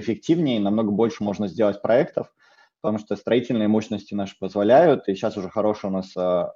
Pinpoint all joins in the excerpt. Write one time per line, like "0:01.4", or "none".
none